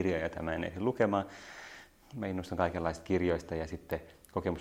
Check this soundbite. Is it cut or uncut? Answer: uncut